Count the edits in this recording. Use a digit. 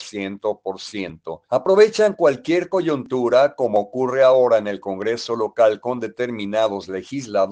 1